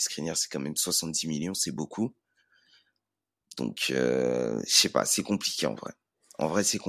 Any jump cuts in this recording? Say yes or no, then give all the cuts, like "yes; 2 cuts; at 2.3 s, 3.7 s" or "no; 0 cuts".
no; 0 cuts